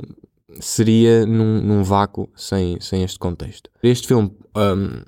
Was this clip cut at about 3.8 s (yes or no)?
yes